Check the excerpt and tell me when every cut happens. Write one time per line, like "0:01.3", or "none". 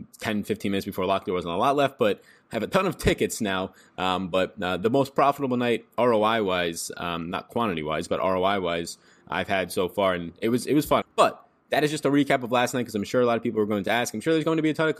0:11.0